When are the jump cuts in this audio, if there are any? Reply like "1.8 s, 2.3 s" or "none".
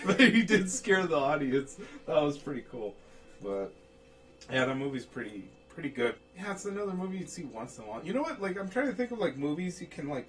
6.2 s